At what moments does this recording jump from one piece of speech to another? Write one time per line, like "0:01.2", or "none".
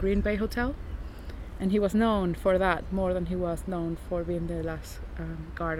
none